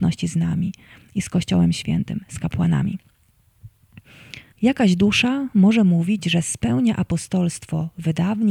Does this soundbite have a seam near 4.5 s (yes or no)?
yes